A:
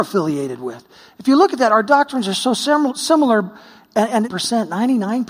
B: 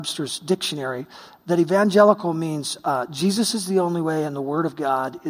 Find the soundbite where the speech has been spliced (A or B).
A